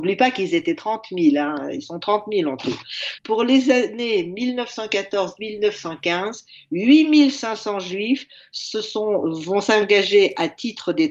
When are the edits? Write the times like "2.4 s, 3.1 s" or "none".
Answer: 3.2 s